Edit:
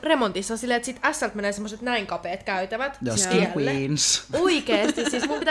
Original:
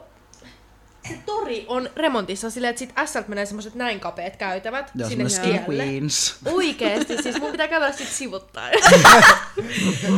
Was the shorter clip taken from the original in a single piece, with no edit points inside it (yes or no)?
no